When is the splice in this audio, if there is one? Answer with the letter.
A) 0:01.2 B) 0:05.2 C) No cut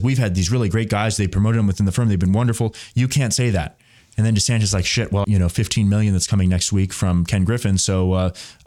B